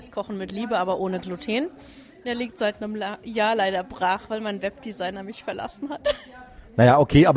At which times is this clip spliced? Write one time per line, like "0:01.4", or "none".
none